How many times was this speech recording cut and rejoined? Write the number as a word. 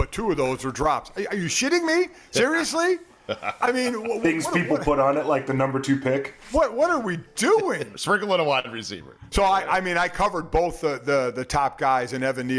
one